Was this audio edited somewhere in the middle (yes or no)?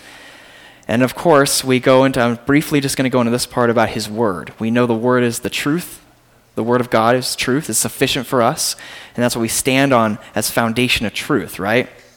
no